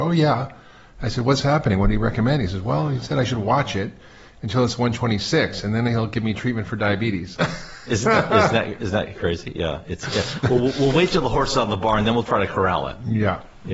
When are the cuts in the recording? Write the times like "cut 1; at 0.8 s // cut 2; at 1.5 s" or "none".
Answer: none